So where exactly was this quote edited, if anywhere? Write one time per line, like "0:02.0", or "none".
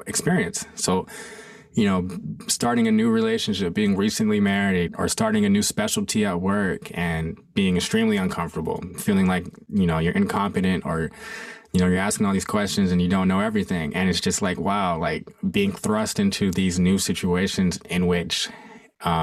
0:04.9